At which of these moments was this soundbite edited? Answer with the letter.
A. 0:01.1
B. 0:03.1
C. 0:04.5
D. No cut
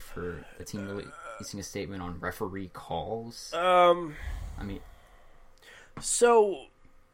D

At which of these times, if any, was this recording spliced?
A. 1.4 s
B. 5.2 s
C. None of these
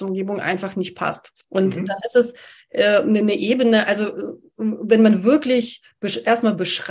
A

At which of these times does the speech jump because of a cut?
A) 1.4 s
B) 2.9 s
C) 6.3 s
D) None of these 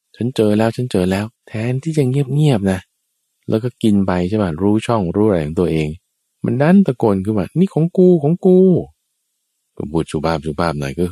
A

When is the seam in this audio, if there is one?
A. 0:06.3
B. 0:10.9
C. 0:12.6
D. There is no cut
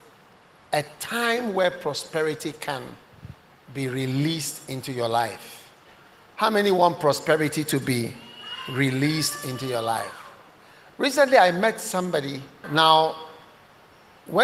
C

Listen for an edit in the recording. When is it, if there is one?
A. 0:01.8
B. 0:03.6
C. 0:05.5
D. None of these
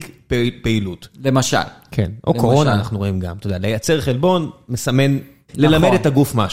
C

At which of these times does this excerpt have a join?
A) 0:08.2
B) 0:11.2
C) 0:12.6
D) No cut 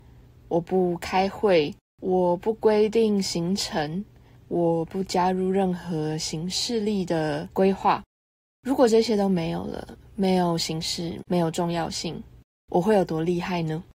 B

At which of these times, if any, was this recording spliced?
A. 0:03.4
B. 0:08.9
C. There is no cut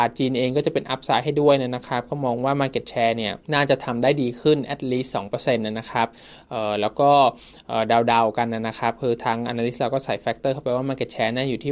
A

